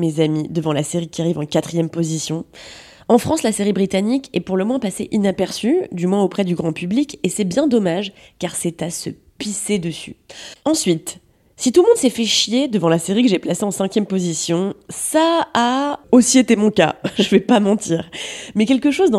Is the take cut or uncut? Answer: cut